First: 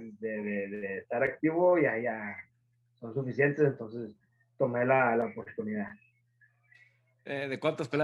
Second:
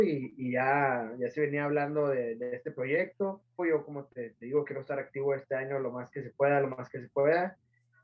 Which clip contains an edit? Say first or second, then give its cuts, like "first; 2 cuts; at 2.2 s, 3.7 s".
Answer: second; 1 cut; at 3.6 s